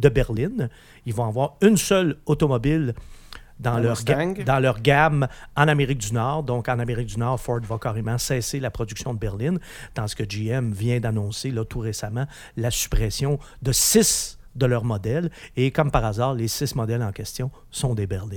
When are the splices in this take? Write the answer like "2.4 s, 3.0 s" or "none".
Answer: none